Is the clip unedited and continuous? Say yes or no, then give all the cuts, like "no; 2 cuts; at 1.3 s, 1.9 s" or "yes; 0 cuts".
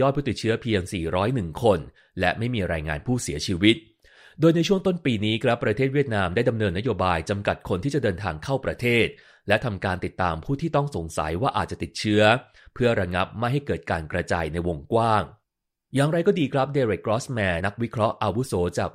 no; 1 cut; at 17.6 s